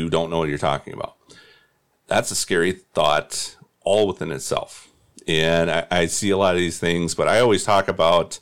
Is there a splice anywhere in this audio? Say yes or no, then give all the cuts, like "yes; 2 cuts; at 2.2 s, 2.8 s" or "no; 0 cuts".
no; 0 cuts